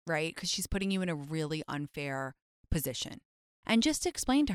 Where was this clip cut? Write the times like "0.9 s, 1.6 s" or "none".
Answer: 3.6 s